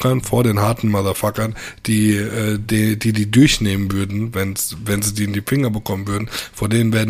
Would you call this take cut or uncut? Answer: uncut